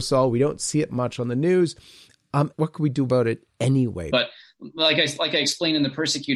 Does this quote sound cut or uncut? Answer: cut